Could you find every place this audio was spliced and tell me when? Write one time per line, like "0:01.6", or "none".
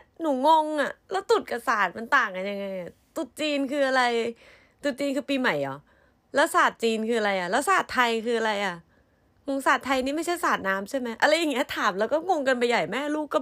0:09.5